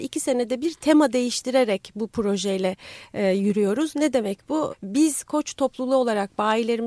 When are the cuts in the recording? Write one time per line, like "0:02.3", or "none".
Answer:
0:04.7